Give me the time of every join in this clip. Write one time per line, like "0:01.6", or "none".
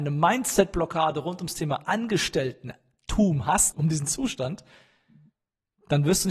0:03.7